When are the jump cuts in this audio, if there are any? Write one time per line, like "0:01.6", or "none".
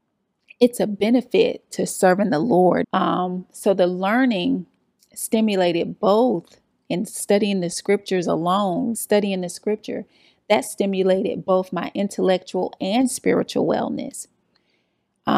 0:02.8
0:08.9